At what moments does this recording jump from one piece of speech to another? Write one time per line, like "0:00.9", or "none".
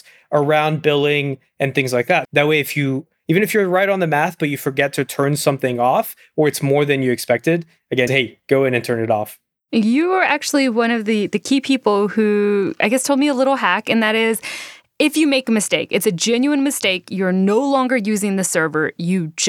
0:02.2
0:08.1